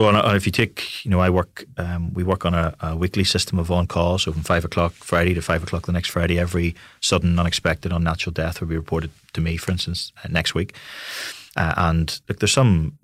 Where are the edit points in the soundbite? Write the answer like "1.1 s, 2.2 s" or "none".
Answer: 11.5 s